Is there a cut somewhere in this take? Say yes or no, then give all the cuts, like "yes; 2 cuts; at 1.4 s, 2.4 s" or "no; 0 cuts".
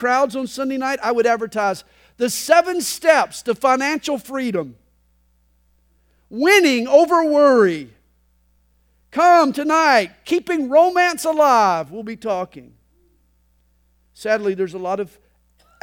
yes; 1 cut; at 14.0 s